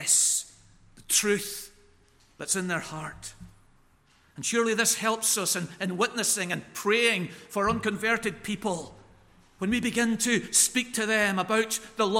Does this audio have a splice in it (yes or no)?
no